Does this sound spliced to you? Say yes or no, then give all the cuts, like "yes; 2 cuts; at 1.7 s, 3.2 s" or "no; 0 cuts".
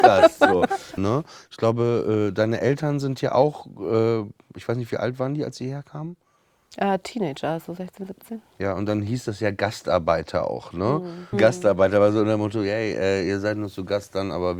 yes; 2 cuts; at 1.0 s, 11.3 s